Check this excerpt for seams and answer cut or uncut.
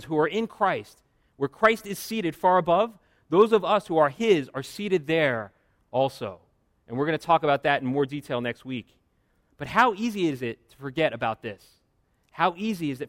uncut